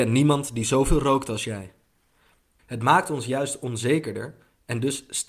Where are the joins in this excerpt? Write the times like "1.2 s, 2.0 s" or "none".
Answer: 2.6 s